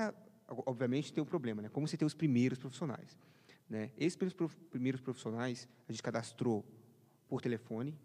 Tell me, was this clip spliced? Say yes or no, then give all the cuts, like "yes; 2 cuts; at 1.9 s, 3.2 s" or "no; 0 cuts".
no; 0 cuts